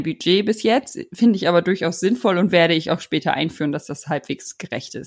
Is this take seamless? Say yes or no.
yes